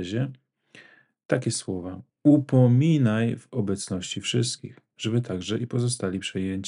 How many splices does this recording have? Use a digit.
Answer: 1